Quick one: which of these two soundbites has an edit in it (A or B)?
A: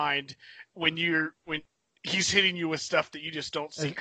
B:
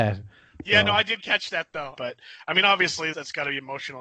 B